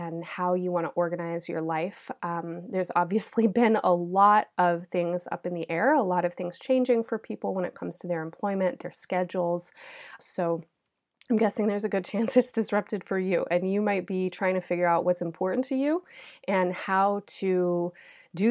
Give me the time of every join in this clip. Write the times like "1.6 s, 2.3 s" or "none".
10.2 s